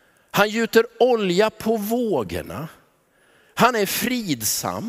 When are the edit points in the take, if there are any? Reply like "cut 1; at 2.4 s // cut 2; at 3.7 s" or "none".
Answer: none